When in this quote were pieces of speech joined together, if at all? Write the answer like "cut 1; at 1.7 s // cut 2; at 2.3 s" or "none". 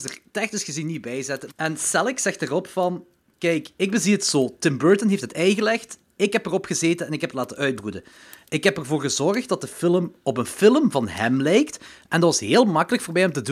cut 1; at 1.5 s